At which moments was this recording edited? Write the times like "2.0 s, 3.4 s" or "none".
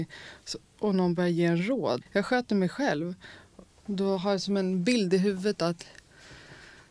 2.0 s, 3.7 s